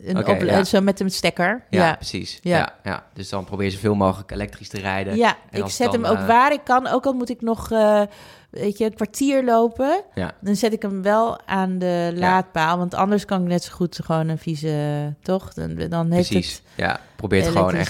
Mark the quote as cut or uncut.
uncut